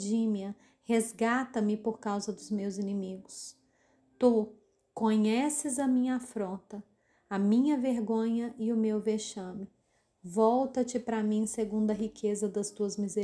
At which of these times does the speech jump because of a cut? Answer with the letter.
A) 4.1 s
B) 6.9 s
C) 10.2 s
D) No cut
C